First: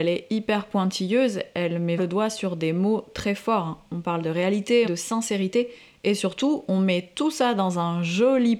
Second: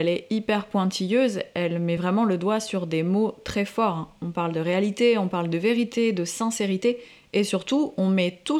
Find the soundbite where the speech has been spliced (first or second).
first